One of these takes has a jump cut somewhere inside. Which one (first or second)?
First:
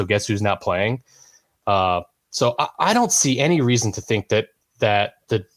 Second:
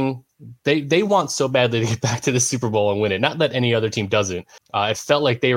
second